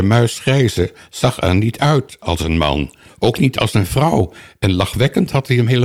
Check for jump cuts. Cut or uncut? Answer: uncut